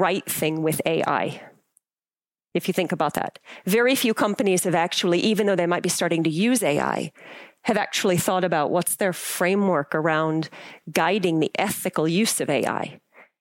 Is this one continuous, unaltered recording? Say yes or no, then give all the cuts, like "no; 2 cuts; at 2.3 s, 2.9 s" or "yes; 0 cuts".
yes; 0 cuts